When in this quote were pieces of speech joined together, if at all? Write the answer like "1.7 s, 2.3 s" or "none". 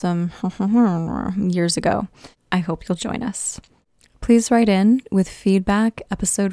none